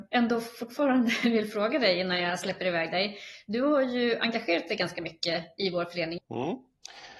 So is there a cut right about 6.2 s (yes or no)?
yes